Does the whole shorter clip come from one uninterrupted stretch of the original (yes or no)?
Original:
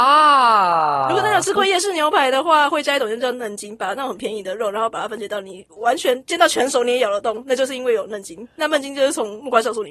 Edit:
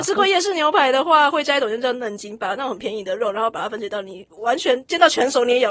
yes